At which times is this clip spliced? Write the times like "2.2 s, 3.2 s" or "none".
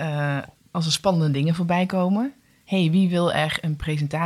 none